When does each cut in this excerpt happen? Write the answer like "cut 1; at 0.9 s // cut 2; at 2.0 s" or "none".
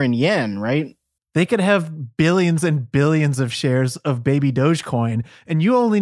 cut 1; at 1.2 s